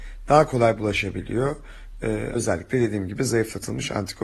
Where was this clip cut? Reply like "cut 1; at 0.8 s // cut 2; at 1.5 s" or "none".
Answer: cut 1; at 2.3 s